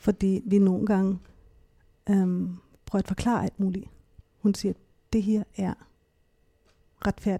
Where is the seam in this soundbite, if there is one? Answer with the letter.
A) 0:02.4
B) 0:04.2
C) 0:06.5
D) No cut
B